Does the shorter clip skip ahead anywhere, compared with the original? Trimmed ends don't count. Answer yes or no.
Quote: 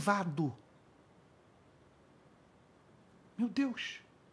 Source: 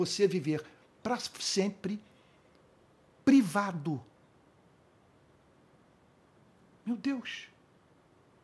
no